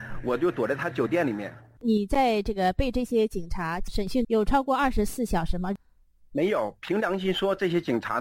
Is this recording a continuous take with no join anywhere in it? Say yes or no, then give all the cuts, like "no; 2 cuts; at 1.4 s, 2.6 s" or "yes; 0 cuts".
no; 1 cut; at 4.2 s